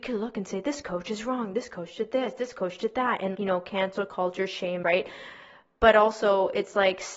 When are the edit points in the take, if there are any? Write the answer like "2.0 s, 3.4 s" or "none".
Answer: 3.3 s, 4.8 s